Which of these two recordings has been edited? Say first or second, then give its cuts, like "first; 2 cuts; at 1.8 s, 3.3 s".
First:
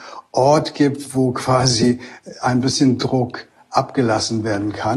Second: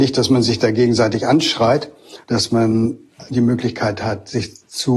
second; 1 cut; at 2.2 s